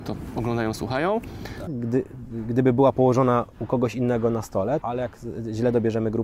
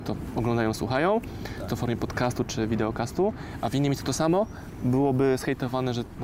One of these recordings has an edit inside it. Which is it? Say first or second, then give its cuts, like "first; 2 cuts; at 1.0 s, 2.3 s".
first; 2 cuts; at 1.7 s, 4.8 s